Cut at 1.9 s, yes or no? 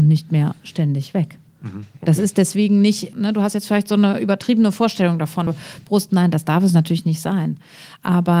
no